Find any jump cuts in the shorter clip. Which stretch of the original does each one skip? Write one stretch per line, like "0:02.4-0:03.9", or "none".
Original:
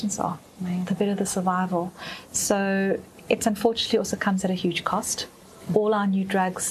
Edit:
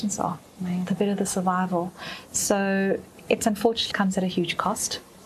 0:03.9-0:04.2